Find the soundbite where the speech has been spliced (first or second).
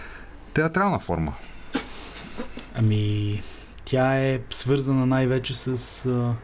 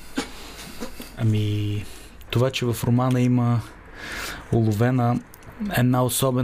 second